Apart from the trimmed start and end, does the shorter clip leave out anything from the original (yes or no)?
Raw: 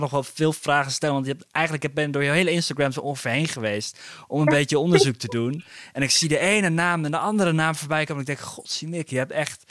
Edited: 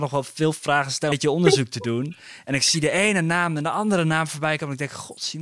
yes